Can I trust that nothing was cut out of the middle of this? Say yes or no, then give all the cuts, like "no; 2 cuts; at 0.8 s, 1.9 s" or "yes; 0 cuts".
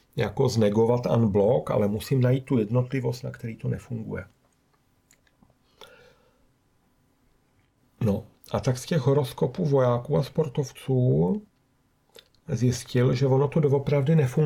yes; 0 cuts